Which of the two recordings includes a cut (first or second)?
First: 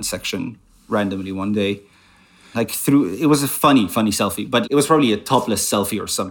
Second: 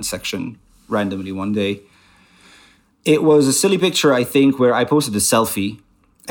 first